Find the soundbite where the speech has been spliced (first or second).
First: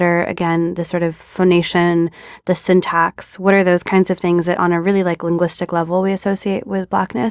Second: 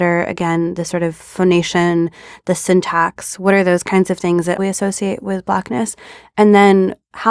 second